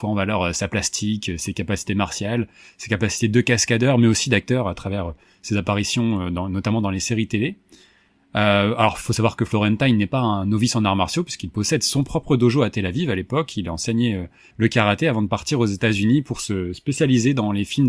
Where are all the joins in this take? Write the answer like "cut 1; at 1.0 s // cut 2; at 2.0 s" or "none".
none